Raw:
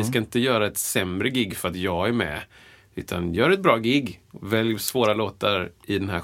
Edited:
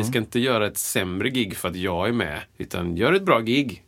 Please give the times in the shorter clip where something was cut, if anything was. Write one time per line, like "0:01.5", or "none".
0:02.5